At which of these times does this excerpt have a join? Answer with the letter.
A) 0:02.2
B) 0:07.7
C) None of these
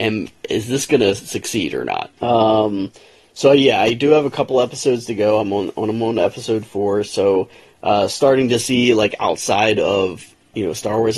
A